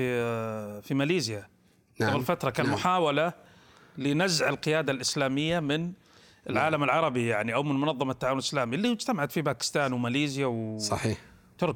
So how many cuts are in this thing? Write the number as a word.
zero